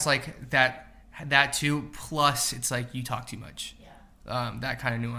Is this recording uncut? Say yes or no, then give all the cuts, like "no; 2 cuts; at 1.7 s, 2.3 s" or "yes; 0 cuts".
yes; 0 cuts